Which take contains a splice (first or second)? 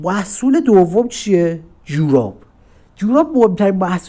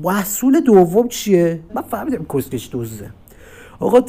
second